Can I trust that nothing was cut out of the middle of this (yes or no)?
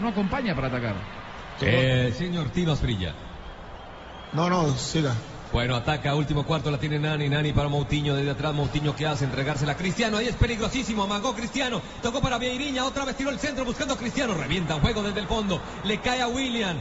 no